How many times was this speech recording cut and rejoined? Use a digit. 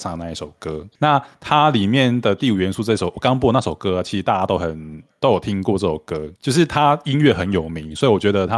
2